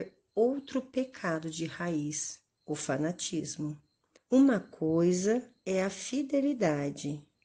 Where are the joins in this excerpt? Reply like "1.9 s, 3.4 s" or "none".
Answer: 4.2 s